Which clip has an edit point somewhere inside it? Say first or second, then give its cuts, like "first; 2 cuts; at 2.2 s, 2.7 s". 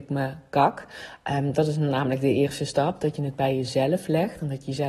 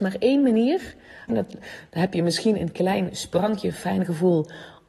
second; 1 cut; at 1.3 s